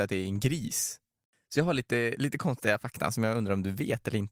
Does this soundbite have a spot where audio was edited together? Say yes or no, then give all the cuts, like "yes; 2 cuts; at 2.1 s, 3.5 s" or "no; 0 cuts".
no; 0 cuts